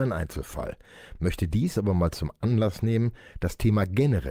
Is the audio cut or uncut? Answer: uncut